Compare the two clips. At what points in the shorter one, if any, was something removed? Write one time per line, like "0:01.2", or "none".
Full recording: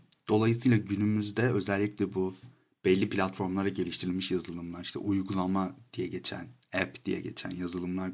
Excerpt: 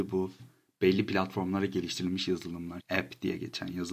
0:02.8